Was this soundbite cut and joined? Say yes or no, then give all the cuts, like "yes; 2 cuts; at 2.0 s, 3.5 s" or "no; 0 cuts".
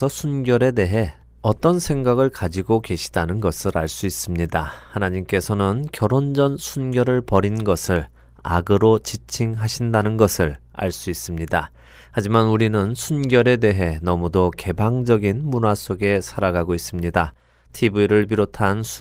no; 0 cuts